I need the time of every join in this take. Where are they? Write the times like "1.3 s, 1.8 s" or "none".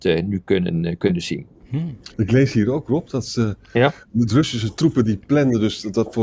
2.1 s

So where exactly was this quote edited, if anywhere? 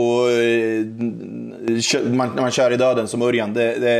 none

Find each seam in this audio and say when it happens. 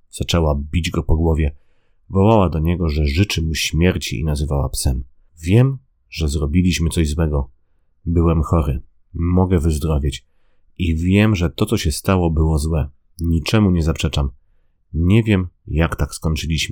5.3 s

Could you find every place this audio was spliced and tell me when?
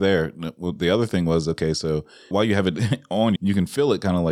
2.3 s, 3.4 s

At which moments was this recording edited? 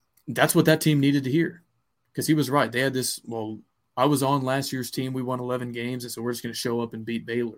none

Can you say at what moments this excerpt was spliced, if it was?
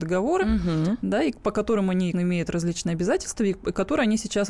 2.1 s

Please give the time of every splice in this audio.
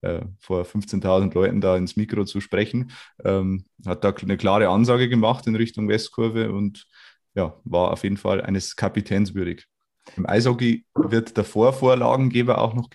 10.2 s

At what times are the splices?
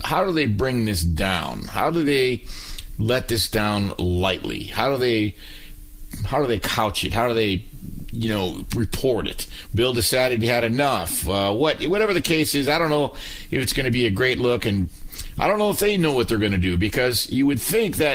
9.7 s

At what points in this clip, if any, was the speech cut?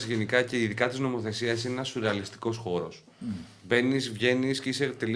none

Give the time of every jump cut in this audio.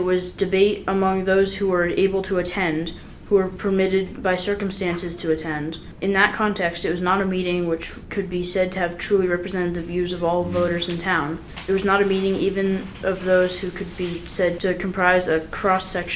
none

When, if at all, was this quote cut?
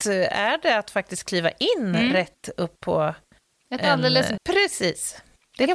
4.4 s

